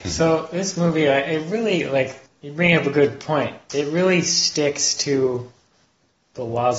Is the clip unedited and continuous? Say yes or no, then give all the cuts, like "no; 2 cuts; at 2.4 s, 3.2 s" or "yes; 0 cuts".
yes; 0 cuts